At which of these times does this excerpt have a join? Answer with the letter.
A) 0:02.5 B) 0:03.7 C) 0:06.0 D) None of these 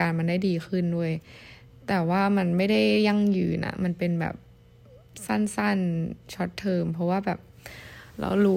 D